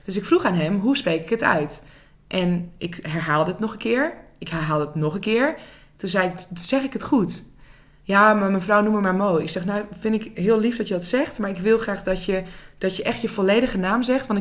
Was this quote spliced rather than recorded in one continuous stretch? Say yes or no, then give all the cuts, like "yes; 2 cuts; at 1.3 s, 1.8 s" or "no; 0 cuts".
no; 0 cuts